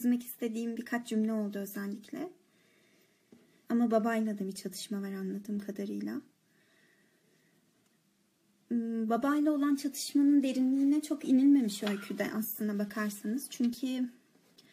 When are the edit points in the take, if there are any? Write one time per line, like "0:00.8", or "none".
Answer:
0:03.7